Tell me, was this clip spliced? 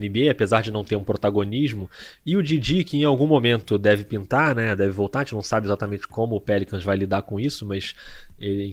no; 0 cuts

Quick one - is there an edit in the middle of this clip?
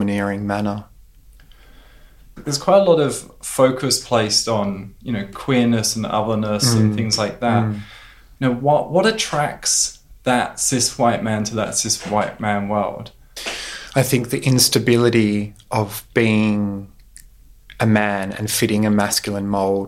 no; 0 cuts

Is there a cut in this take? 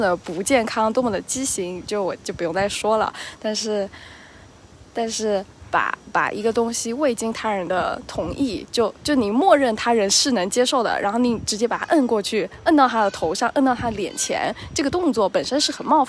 yes; 1 cut; at 2.2 s

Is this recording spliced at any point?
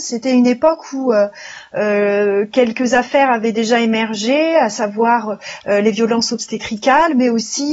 no; 0 cuts

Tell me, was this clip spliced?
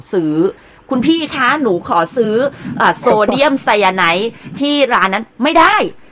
no; 0 cuts

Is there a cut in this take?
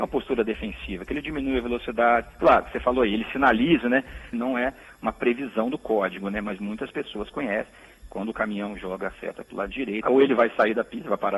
yes; 2 cuts; at 4.3 s, 10.0 s

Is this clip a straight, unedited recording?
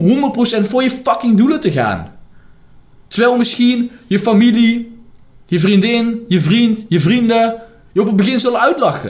yes; 0 cuts

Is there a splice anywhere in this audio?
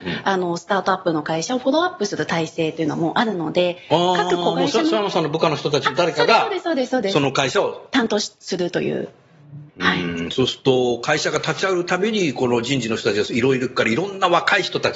yes; 1 cut; at 9.7 s

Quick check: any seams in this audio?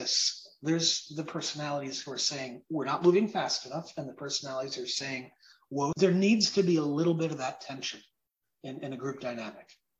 yes; 1 cut; at 5.9 s

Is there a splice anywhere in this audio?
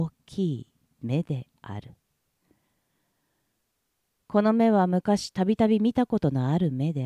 no; 0 cuts

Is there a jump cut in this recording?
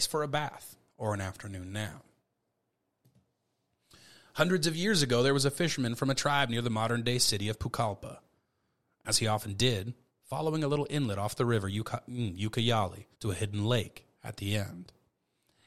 yes; 2 cuts; at 10.1 s, 13.1 s

